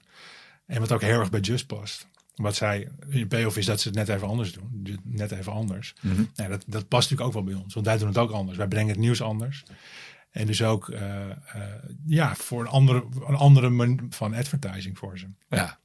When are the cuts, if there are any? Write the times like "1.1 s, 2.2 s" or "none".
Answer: 12.3 s, 14.1 s